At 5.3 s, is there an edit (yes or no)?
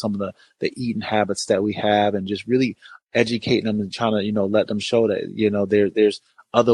no